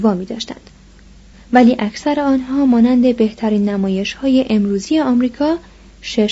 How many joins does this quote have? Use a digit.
1